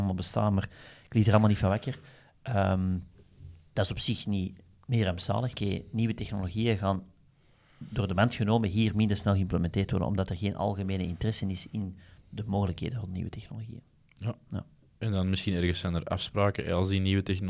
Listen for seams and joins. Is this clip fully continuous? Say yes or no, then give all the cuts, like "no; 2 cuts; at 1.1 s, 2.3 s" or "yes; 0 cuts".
no; 1 cut; at 5.6 s